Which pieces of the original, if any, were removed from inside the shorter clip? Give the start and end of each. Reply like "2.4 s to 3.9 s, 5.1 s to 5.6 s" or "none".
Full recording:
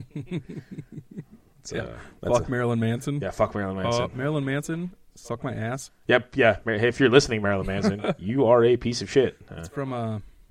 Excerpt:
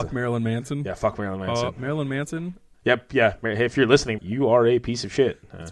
5.1 s to 6.0 s, 7.4 s to 8.2 s